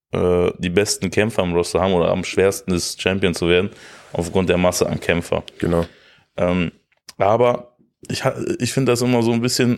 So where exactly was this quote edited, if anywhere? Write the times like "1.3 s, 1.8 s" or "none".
none